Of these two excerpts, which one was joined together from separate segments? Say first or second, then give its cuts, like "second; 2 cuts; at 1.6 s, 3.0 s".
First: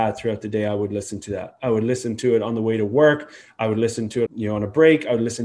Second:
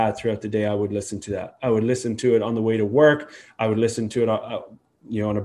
first; 1 cut; at 4.3 s